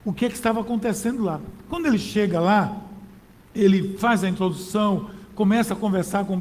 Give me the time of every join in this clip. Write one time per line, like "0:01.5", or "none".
none